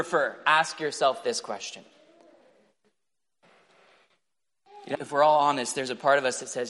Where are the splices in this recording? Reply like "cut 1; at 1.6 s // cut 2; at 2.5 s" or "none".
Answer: cut 1; at 4.9 s